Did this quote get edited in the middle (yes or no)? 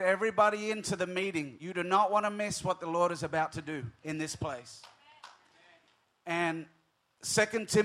no